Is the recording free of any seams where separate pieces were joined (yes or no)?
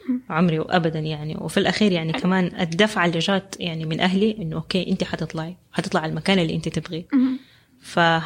no